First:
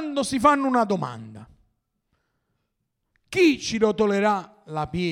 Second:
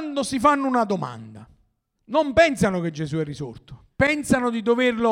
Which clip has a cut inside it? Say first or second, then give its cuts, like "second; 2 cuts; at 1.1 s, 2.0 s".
second; 2 cuts; at 2.0 s, 3.9 s